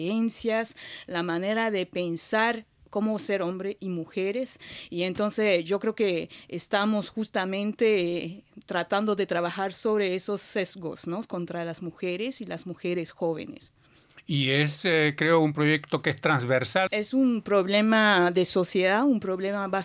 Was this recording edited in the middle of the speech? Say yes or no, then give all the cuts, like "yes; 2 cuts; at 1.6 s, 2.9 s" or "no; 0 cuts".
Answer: yes; 1 cut; at 16.9 s